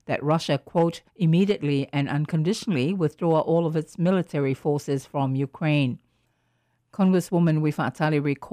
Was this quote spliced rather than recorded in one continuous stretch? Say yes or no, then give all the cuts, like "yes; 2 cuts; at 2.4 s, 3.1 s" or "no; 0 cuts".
yes; 1 cut; at 1.1 s